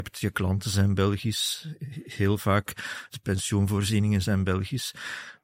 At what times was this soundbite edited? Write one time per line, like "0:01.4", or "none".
0:03.1
0:04.2